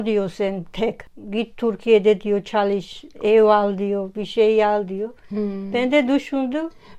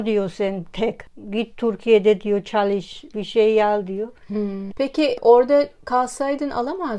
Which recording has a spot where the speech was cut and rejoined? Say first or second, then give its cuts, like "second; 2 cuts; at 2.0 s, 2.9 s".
second; 2 cuts; at 3.1 s, 4.7 s